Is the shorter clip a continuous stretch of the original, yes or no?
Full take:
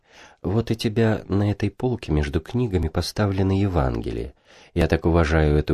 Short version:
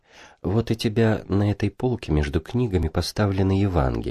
yes